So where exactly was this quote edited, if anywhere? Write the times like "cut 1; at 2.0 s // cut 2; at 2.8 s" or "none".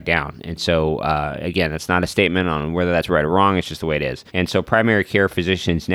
cut 1; at 4.3 s